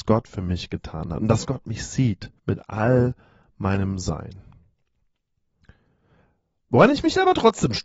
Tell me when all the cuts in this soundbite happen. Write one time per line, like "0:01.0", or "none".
0:02.4